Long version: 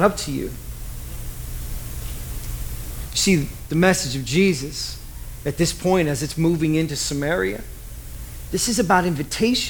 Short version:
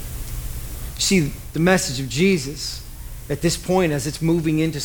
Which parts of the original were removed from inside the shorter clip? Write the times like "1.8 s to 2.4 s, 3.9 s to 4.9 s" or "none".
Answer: none